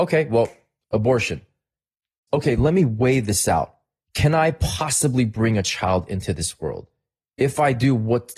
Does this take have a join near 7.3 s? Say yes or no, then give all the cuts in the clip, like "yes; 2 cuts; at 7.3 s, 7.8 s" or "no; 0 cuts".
no; 1 cut; at 2.3 s